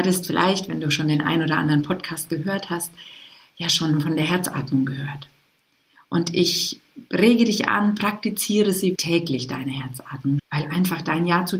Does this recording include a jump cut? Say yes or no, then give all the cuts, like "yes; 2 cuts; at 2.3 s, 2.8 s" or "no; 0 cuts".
yes; 2 cuts; at 8.9 s, 10.4 s